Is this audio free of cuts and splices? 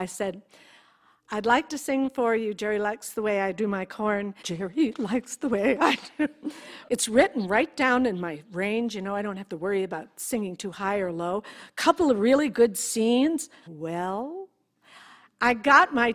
no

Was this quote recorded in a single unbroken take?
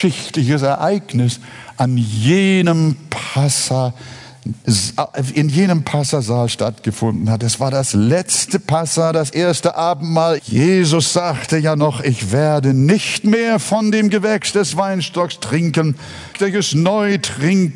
no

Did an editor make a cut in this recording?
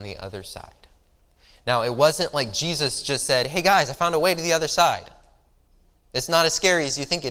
no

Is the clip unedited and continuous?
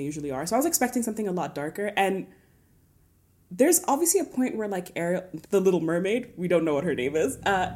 no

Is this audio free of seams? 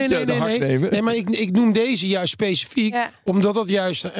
yes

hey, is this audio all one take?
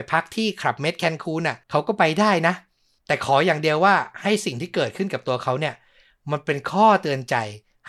no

